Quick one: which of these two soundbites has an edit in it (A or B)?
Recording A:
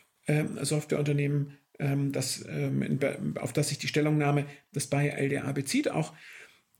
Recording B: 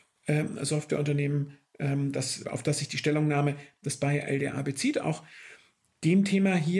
B